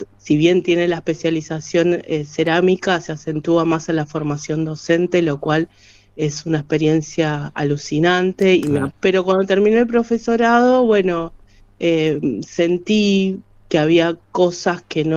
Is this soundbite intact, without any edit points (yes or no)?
no